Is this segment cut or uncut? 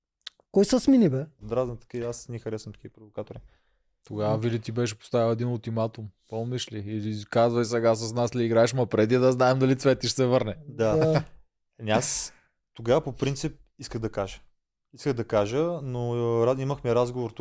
cut